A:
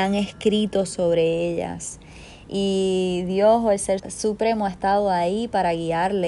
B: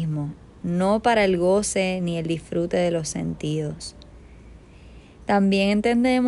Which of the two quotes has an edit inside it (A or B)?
A